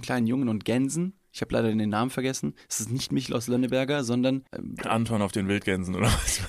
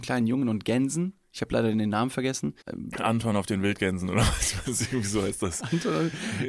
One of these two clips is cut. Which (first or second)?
second